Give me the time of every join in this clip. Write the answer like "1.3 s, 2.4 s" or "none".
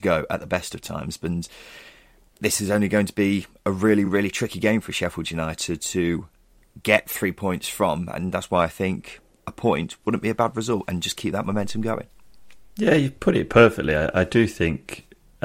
none